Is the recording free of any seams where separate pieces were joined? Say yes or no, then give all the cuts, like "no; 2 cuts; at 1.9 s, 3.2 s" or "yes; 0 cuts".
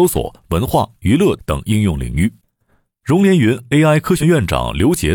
no; 1 cut; at 4.2 s